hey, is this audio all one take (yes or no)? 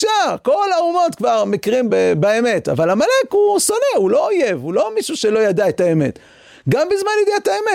no